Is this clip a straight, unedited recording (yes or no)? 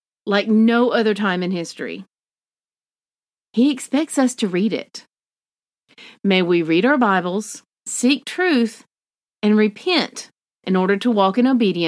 no